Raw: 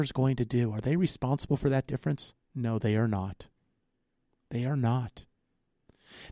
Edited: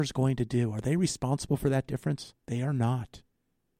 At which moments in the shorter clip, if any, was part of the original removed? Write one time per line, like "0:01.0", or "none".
0:02.4